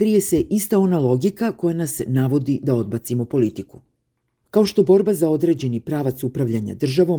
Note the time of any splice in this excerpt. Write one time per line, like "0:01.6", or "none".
none